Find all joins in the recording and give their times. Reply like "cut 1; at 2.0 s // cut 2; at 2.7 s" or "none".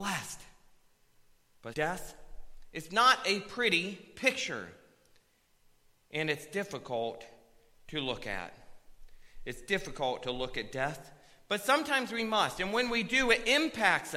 cut 1; at 1.7 s